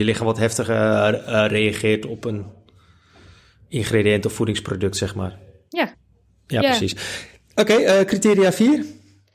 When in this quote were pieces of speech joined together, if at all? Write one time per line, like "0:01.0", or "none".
none